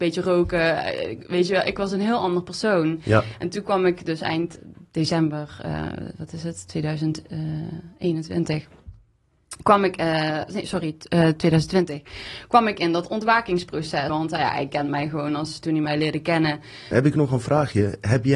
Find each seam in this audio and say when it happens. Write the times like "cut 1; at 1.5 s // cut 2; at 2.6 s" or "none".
cut 1; at 14.1 s // cut 2; at 16.9 s

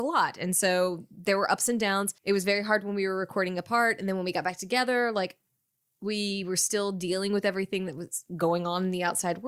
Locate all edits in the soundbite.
cut 1; at 2.2 s

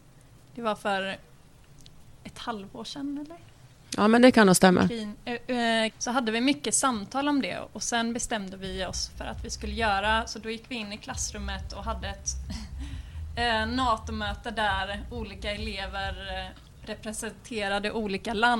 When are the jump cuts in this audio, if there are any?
cut 1; at 5.9 s

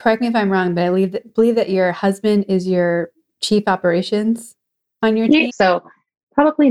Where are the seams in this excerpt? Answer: cut 1; at 5.5 s

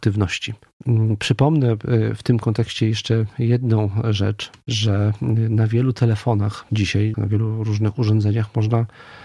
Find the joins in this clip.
cut 1; at 4.6 s // cut 2; at 7.1 s

